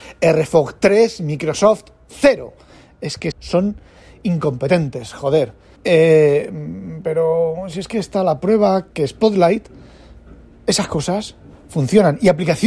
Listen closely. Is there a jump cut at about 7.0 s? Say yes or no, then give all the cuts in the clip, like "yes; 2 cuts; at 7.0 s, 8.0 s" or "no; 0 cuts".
no; 2 cuts; at 3.3 s, 5.8 s